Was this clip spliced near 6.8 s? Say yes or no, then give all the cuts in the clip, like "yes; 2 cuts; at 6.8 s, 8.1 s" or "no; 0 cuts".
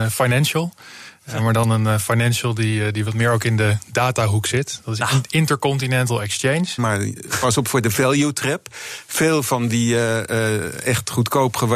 yes; 1 cut; at 6.8 s